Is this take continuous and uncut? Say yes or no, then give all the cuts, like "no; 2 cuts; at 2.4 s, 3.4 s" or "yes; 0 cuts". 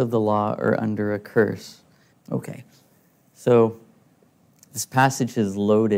no; 1 cut; at 2.1 s